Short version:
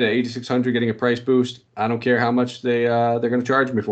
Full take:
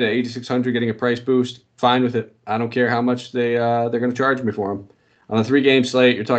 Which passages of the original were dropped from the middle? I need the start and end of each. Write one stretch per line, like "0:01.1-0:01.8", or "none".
0:01.7-0:02.4